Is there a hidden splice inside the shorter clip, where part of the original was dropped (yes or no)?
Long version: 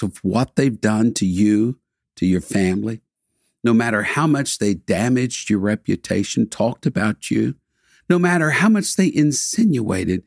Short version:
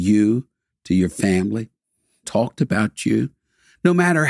yes